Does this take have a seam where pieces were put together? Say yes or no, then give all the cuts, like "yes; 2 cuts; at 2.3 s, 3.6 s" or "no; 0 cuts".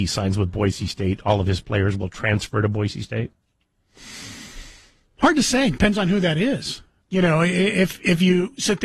yes; 1 cut; at 7.0 s